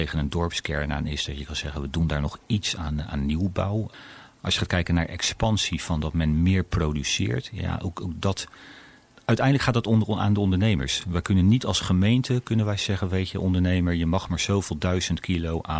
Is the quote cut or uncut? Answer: uncut